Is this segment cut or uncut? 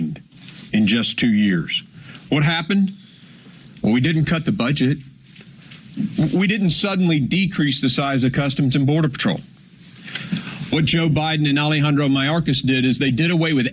uncut